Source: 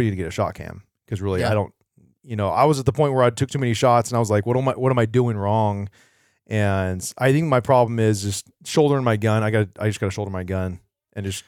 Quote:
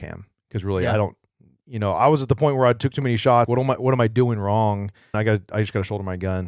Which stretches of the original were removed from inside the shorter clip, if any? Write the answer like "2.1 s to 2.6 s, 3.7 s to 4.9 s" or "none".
4.0 s to 4.4 s, 6.1 s to 9.4 s